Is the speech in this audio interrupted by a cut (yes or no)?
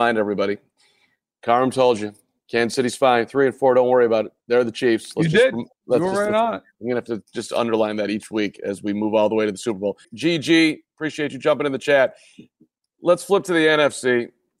yes